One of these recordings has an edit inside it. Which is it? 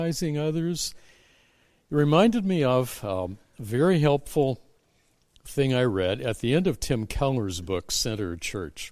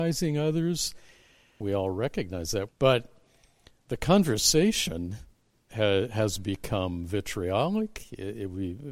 second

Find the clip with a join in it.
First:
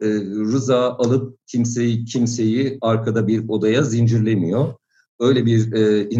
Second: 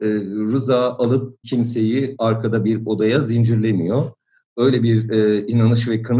second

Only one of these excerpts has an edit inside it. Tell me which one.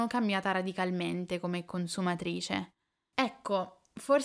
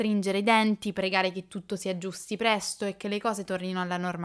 first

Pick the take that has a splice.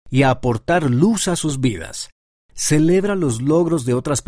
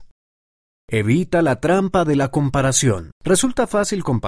second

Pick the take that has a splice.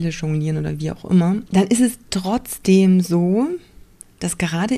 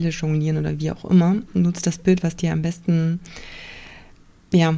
first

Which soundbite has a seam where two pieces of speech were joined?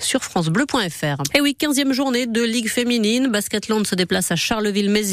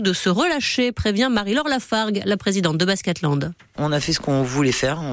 first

